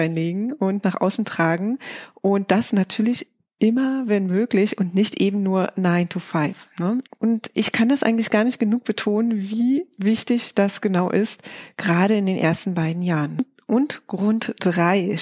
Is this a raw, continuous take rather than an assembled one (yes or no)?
no